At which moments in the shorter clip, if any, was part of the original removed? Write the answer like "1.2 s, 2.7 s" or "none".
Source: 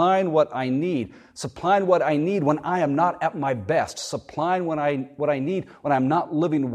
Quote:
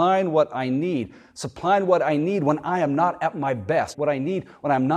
3.9 s